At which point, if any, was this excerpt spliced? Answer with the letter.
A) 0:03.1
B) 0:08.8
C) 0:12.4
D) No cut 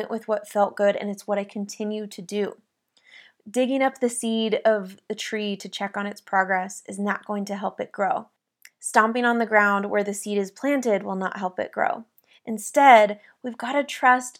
C